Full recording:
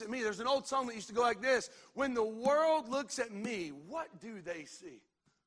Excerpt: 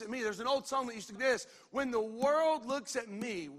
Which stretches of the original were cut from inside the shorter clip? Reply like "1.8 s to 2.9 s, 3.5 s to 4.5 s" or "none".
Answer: 1.1 s to 1.4 s